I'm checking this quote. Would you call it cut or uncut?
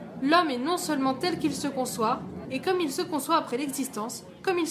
cut